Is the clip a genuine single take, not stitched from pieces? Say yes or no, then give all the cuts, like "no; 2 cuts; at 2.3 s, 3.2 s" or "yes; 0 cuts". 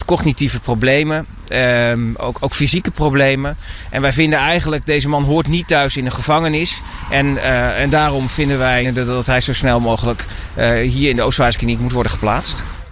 yes; 0 cuts